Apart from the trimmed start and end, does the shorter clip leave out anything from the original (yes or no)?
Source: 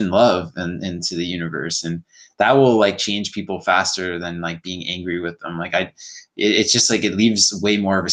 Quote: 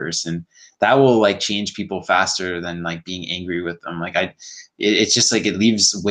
no